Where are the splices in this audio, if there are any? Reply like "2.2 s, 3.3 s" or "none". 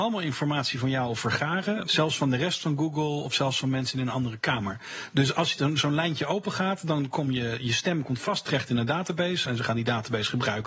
1.8 s